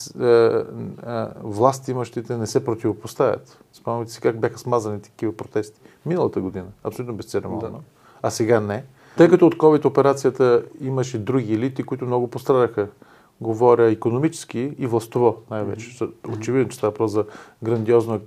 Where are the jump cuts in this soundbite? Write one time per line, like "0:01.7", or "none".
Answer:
0:09.2